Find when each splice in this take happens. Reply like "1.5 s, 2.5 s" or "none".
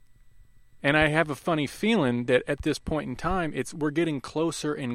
none